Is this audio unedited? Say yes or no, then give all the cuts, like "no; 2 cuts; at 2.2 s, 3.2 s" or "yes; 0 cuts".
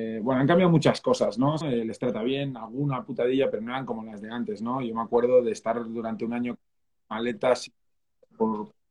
no; 1 cut; at 1.6 s